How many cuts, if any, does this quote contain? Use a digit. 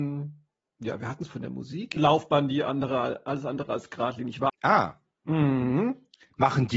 2